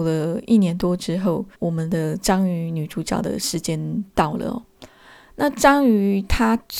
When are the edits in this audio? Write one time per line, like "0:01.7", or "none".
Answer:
0:01.5